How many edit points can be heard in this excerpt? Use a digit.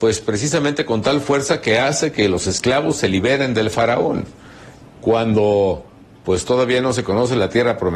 1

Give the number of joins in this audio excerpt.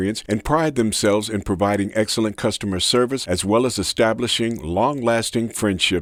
0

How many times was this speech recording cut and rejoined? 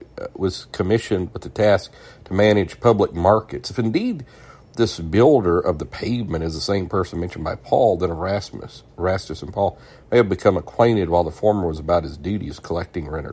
0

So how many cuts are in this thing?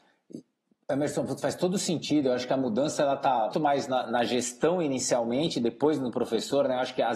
1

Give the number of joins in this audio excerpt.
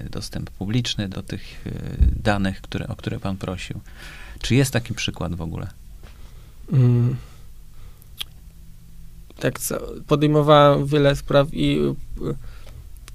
2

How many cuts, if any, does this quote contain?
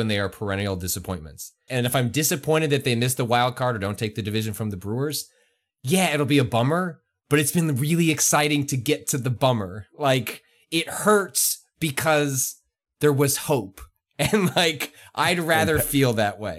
1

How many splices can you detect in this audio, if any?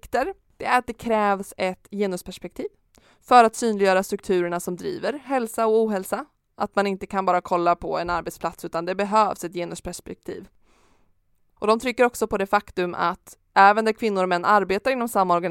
0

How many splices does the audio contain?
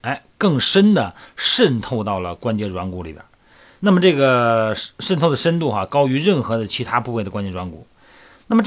0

